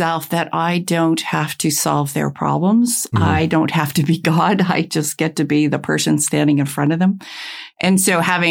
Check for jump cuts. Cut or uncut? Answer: uncut